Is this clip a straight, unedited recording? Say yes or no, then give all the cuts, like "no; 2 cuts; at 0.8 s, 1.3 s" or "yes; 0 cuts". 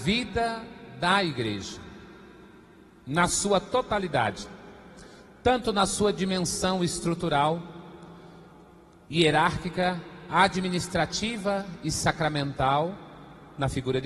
yes; 0 cuts